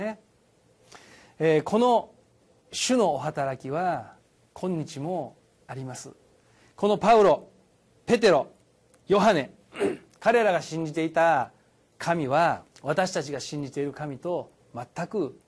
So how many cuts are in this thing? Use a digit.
2